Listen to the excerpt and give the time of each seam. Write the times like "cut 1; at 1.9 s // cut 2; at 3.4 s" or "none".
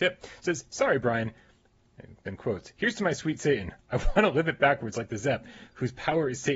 none